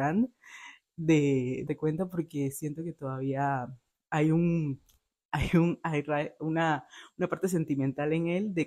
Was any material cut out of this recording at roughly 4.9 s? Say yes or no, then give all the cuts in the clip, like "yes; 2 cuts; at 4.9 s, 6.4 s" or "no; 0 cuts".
no; 1 cut; at 1.7 s